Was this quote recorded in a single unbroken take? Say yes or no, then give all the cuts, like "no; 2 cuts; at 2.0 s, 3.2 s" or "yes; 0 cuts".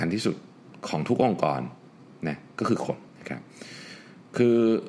no; 1 cut; at 3.1 s